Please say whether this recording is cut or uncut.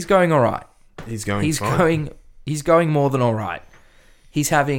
uncut